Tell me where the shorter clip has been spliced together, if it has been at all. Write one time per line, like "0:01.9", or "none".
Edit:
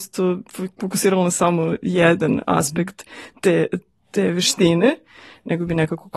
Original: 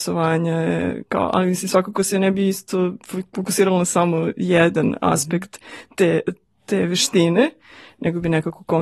none

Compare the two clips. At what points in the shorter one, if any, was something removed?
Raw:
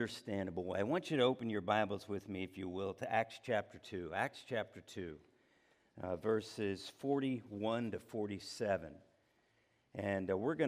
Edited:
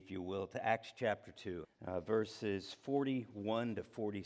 0:01.6

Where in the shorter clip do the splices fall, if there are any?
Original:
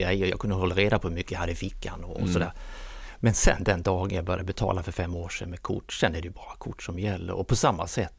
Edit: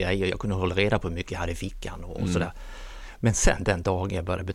none

